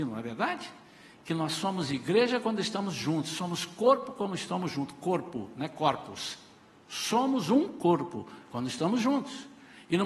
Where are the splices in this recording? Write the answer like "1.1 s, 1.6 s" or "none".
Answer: none